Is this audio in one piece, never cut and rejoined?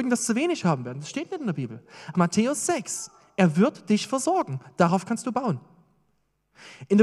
no; 1 cut; at 2.1 s

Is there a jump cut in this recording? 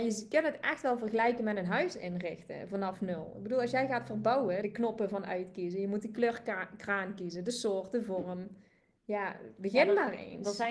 yes; 1 cut; at 4.6 s

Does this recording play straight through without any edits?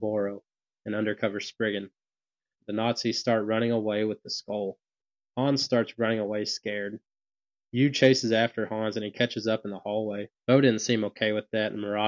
no; 2 cuts; at 2.6 s, 10.3 s

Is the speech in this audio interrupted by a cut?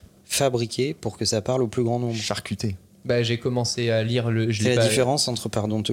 no; 0 cuts

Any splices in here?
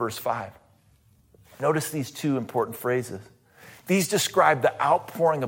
yes; 1 cut; at 3.8 s

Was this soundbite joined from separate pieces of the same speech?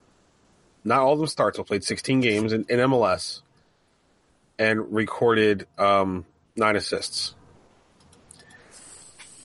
no; 0 cuts

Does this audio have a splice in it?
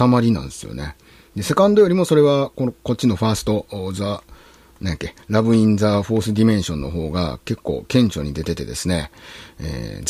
no; 0 cuts

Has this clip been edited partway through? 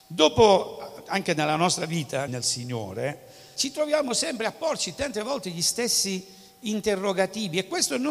yes; 2 cuts; at 2.3 s, 3.6 s

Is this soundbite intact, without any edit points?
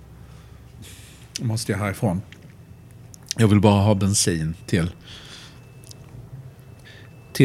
yes; 0 cuts

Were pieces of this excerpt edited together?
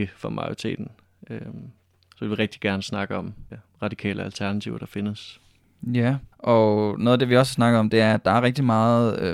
yes; 2 cuts; at 3.5 s, 6.3 s

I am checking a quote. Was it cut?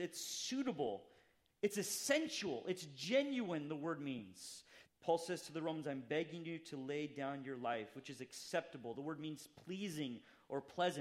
yes; 2 cuts; at 4.8 s, 7.9 s

